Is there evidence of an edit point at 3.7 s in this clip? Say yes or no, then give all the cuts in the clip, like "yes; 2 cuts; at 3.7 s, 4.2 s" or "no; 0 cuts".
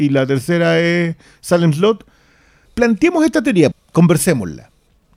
yes; 2 cuts; at 2.7 s, 3.7 s